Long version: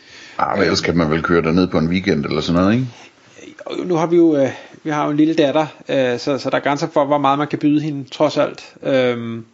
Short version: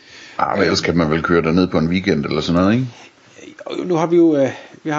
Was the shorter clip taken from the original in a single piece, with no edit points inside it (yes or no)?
yes